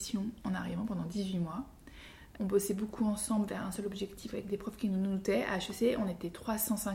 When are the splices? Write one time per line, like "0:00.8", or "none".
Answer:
0:02.4